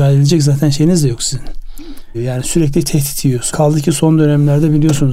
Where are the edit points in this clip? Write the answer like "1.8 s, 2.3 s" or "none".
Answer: 2.1 s, 3.5 s